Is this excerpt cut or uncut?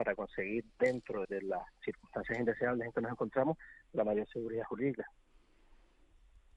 cut